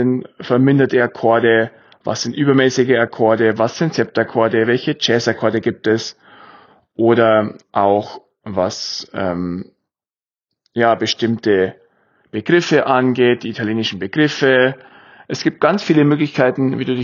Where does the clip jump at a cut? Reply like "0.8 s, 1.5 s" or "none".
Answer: 7.6 s